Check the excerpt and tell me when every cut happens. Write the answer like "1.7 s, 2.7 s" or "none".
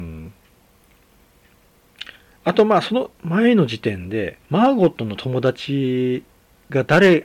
4.5 s